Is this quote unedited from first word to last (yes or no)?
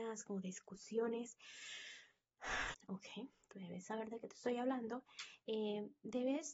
no